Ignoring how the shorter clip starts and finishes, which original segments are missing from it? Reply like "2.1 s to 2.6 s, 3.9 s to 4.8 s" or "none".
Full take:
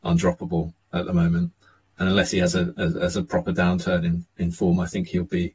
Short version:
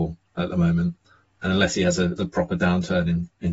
2.7 s to 3.1 s